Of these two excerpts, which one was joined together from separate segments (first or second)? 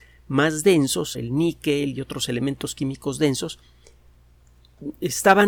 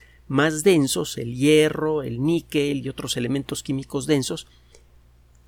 first